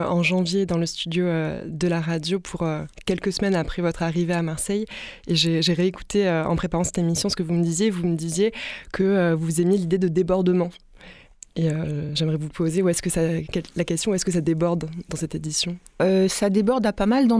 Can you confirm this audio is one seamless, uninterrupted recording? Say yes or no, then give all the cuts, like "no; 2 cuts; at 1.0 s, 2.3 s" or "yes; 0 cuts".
yes; 0 cuts